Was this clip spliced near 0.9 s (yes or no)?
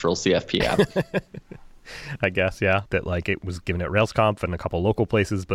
no